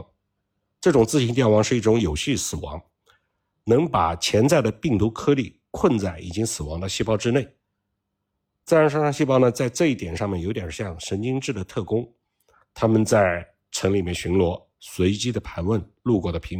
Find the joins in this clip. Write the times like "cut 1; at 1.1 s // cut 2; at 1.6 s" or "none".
none